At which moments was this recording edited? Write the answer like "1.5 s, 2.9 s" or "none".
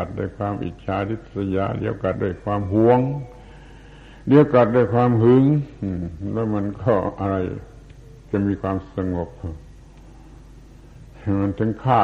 2.1 s

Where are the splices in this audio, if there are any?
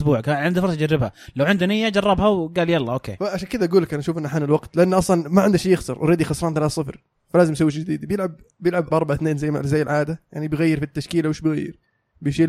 8.9 s

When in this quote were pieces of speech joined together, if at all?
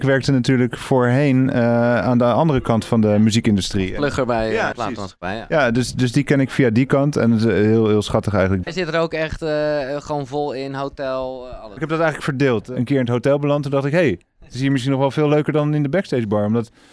4.7 s, 8.6 s, 11.8 s

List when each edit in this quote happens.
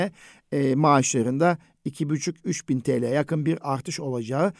none

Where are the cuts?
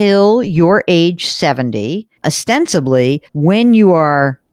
2.2 s, 3.3 s

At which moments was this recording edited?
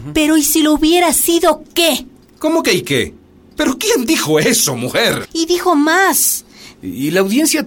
3.6 s, 5.2 s, 6.7 s

